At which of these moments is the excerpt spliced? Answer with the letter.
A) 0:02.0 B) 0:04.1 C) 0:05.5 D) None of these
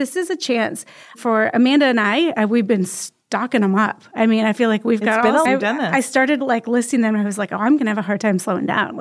C